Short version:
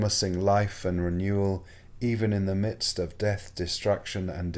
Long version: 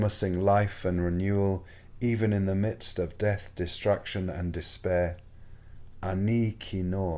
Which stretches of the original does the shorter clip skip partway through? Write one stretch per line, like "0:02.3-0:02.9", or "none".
none